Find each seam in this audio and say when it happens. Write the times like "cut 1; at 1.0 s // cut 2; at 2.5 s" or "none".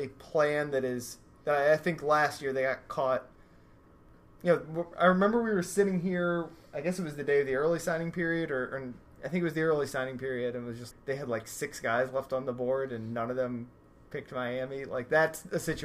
cut 1; at 10.9 s